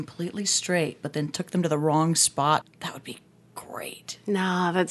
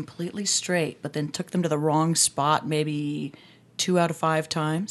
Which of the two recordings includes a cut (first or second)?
first